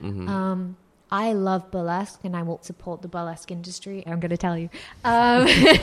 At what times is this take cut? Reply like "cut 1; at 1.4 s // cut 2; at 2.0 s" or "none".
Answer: cut 1; at 2.6 s // cut 2; at 4.1 s